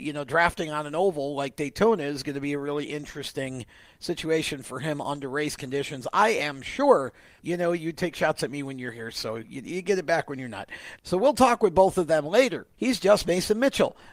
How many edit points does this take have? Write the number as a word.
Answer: three